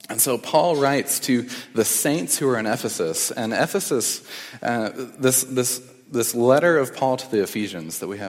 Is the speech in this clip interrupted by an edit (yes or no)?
no